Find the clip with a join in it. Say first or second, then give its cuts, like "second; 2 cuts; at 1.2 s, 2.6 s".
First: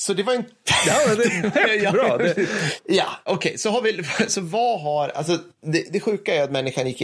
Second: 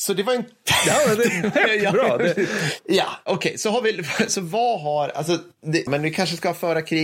second; 1 cut; at 5.9 s